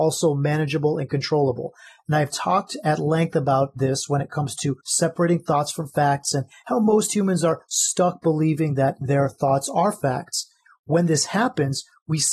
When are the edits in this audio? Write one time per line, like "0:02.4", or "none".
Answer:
none